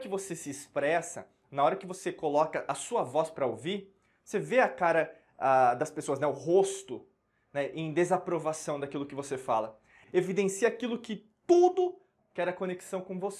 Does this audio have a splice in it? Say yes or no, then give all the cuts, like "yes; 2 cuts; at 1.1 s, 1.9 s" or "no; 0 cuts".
yes; 2 cuts; at 10.0 s, 12.2 s